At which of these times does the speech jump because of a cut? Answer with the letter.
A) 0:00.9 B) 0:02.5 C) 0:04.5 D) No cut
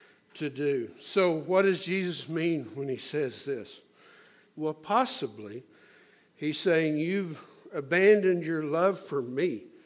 C